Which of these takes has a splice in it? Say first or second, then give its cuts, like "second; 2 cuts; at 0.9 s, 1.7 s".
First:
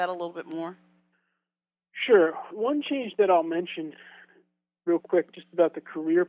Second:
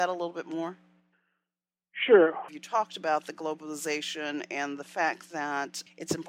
second; 1 cut; at 2.5 s